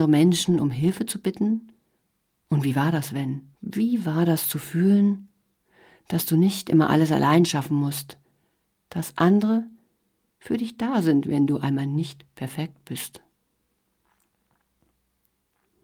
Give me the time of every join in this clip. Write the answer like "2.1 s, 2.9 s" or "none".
3.5 s